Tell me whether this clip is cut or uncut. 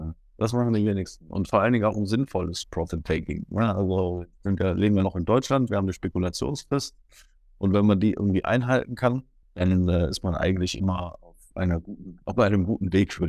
cut